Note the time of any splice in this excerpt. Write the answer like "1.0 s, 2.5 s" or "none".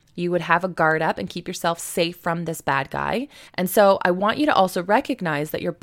3.5 s